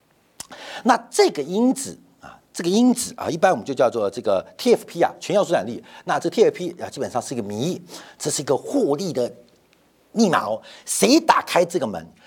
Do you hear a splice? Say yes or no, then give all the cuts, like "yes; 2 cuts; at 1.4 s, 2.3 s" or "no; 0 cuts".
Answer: no; 0 cuts